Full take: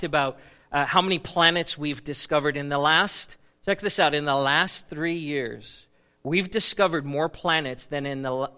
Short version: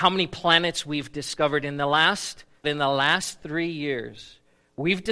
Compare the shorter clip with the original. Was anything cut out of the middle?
yes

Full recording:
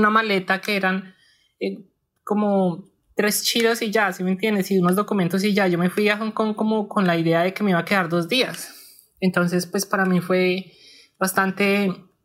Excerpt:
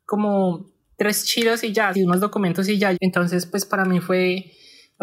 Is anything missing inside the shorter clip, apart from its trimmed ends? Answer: yes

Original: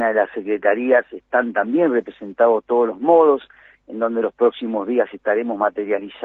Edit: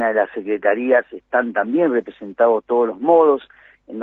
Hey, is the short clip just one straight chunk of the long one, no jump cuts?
yes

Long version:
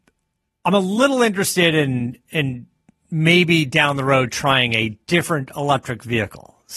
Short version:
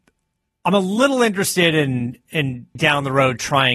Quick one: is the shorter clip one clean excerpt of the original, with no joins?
no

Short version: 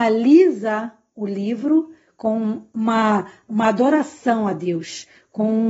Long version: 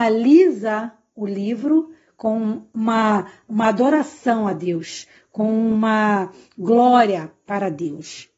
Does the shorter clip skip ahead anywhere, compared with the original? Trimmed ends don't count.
no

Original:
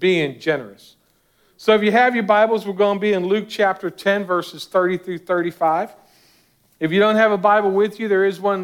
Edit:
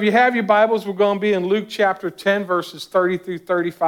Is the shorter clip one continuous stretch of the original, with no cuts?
yes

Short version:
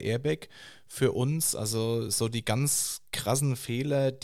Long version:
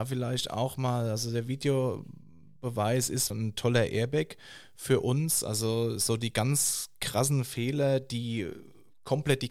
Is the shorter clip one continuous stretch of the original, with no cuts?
yes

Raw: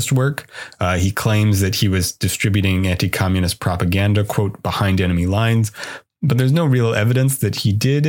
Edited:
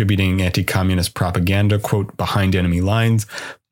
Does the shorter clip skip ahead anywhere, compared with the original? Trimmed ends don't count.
no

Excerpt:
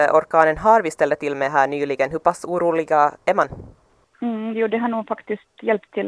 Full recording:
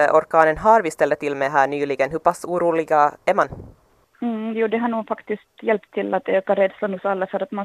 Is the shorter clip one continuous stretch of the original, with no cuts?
yes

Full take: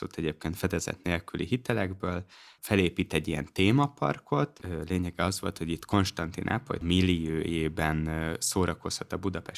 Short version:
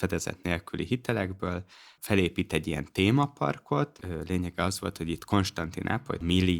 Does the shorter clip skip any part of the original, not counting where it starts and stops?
no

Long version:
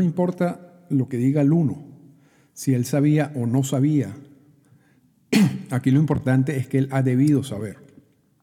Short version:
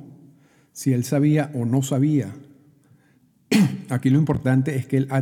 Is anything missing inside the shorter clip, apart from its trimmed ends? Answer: no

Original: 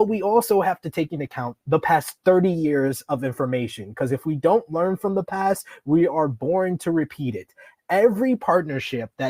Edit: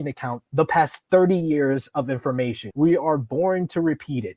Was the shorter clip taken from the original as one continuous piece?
no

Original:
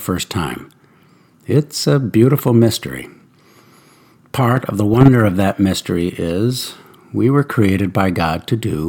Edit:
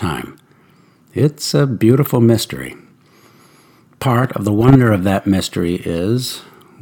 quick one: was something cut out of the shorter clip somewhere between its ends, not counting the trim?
no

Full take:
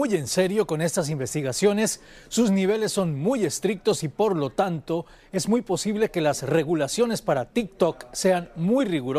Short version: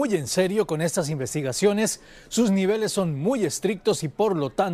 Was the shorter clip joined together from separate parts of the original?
no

